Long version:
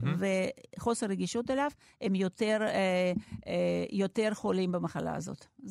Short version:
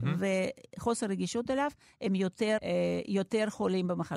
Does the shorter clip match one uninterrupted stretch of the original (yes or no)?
no